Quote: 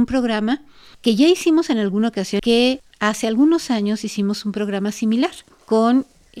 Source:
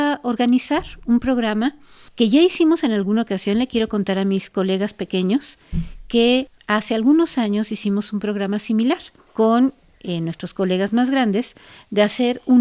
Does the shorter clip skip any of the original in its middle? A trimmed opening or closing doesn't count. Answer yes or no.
yes